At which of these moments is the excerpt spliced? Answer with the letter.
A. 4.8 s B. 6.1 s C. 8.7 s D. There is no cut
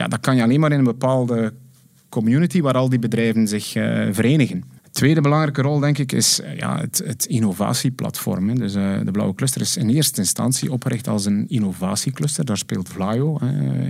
A